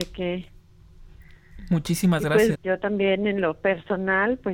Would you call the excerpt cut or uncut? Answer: cut